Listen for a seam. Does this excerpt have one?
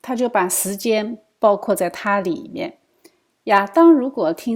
yes; 1 cut; at 3.3 s

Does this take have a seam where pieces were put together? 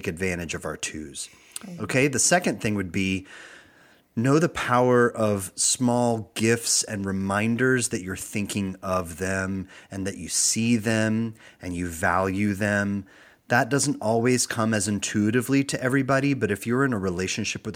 no; 0 cuts

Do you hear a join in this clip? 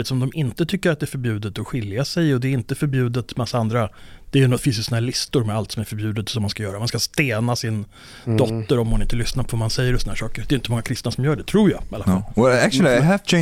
no; 0 cuts

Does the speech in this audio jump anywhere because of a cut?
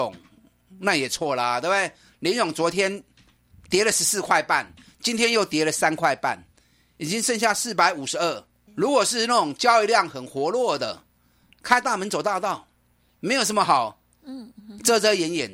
yes; 1 cut; at 8.7 s

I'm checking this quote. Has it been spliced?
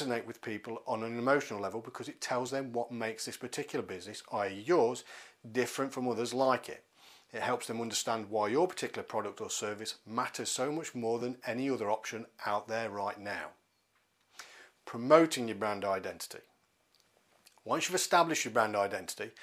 no; 0 cuts

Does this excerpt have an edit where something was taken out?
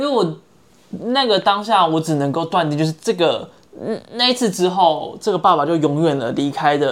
no; 0 cuts

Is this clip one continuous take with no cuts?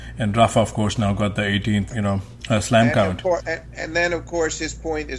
no; 1 cut; at 1.9 s

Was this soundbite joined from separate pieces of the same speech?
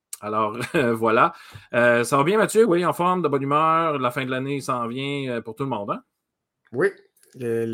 no; 0 cuts

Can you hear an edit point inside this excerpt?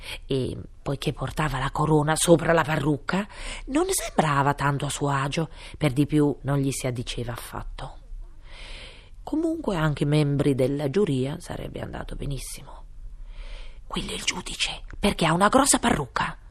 yes; 3 cuts; at 6.4 s, 9.2 s, 13.8 s

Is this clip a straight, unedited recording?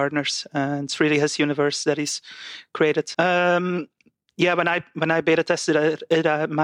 no; 1 cut; at 3.1 s

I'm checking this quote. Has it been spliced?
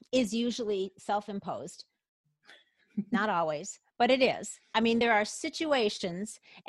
no; 0 cuts

